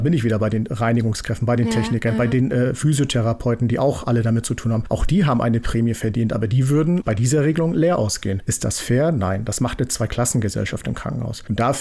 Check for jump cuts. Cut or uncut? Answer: uncut